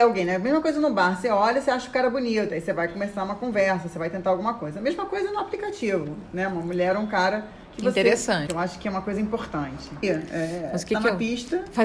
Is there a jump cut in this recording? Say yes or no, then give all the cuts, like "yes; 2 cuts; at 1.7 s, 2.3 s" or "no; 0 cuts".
yes; 3 cuts; at 2.5 s, 8.5 s, 10.0 s